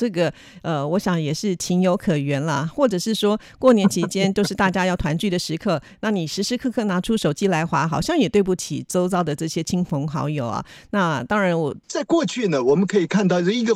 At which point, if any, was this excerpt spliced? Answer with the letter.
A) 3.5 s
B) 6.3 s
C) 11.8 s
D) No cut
C